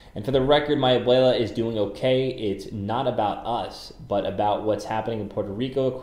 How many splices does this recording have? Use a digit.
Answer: 0